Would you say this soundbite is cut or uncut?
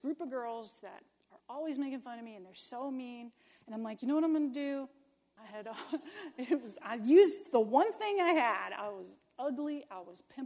cut